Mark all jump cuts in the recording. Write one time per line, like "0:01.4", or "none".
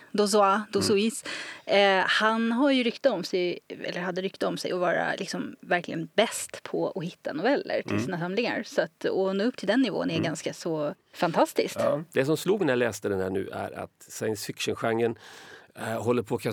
none